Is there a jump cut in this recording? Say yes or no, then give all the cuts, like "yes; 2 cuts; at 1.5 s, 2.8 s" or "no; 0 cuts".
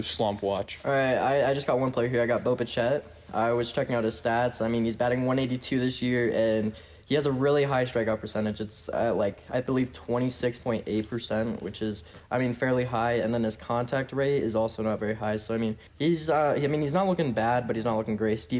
yes; 1 cut; at 15.9 s